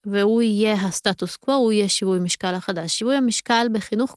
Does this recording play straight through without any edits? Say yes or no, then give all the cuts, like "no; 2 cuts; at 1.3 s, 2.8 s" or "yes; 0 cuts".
yes; 0 cuts